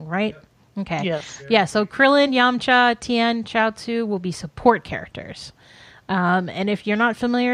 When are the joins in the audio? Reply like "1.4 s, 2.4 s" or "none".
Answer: none